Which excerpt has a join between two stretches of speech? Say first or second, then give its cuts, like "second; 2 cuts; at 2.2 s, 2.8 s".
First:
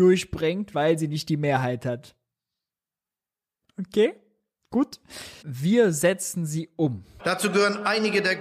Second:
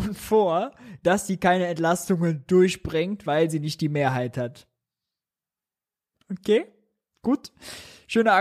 first; 2 cuts; at 5.4 s, 7.2 s